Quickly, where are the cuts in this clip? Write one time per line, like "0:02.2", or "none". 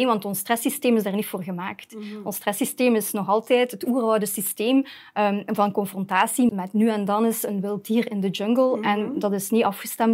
0:06.5